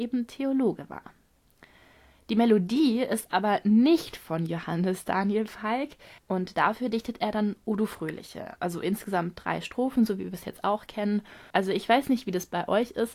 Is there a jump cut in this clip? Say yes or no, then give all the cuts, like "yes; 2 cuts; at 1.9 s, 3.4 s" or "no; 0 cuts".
yes; 2 cuts; at 6.2 s, 11.5 s